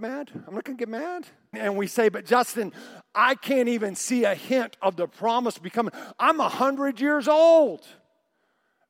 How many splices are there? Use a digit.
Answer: 1